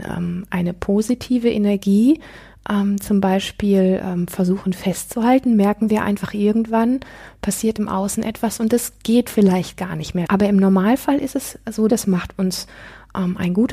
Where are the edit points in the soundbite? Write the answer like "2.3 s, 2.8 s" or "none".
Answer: 10.3 s, 11.9 s